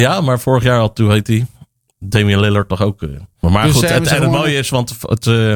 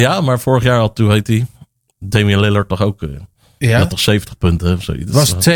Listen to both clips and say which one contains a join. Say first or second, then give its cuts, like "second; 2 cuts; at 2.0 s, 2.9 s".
first; 1 cut; at 3.4 s